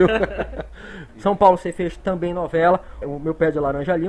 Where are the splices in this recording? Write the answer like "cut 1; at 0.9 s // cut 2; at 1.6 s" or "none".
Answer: cut 1; at 1.1 s // cut 2; at 3.0 s